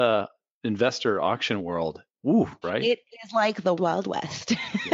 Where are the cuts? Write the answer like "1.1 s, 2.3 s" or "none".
2.6 s, 3.8 s